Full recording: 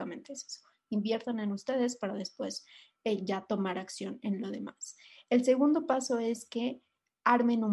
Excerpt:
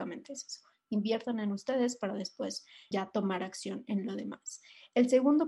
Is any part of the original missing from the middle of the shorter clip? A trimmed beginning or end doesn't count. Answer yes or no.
yes